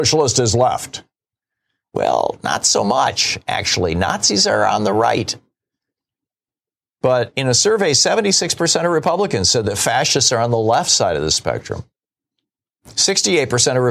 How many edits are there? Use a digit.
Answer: 0